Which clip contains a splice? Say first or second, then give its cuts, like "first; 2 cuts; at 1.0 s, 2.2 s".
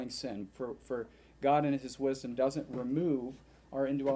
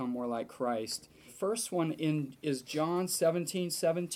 second; 1 cut; at 1.3 s